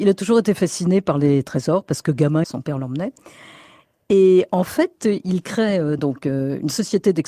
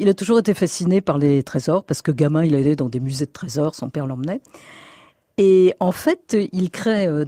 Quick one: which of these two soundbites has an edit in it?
first; 2 cuts; at 2.4 s, 6.0 s

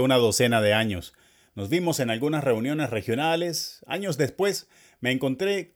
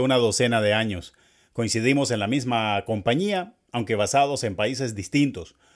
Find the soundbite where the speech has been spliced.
first; 1 cut; at 1.5 s

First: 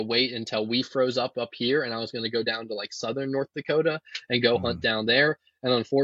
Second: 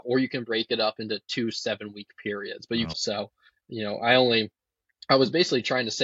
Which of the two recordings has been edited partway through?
second; 1 cut; at 2.9 s

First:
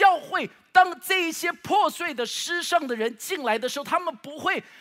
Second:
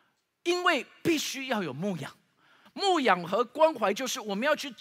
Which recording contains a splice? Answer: second; 1 cut; at 2.7 s

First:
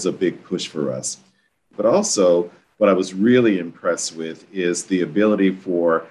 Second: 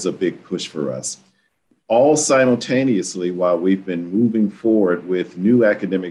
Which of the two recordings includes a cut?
first; 1 cut; at 1.7 s

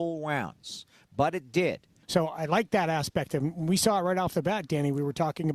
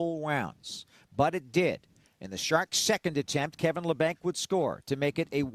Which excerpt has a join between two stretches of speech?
first; 1 cut; at 2.0 s

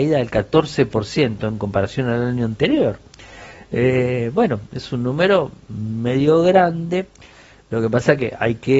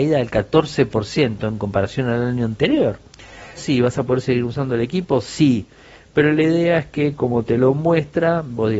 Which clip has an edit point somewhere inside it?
second; 1 cut; at 3.6 s

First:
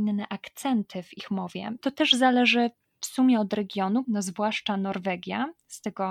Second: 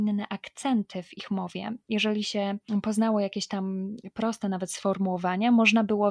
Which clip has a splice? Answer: first; 2 cuts; at 1.8 s, 4.0 s

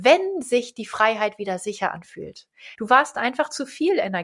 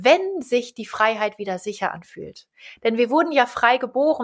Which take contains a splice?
first; 1 cut; at 2.8 s

